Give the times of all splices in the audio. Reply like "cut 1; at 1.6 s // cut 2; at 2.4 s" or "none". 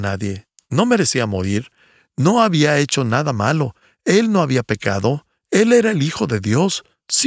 none